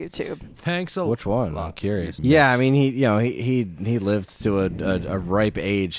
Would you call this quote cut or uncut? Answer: cut